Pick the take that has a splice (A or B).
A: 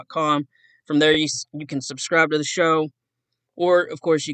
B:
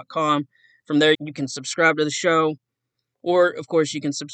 B